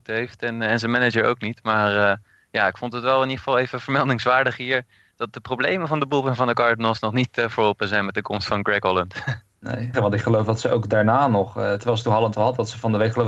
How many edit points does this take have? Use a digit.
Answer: 1